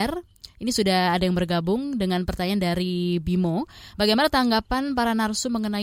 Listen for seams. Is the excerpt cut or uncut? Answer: uncut